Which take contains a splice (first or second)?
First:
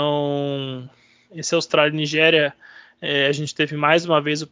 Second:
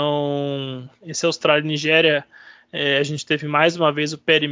second